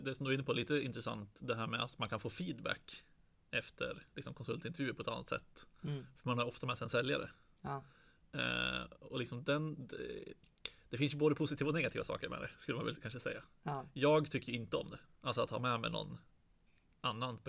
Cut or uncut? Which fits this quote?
uncut